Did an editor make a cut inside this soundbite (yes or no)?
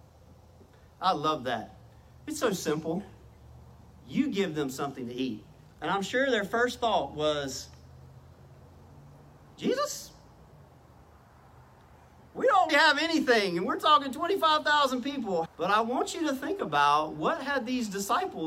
yes